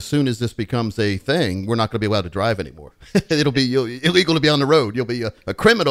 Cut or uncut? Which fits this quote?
uncut